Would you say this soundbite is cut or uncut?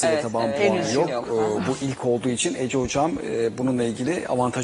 uncut